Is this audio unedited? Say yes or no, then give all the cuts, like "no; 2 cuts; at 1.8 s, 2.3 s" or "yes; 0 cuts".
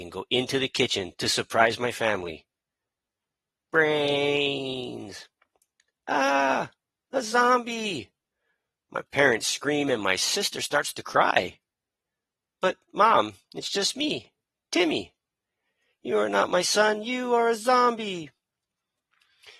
yes; 0 cuts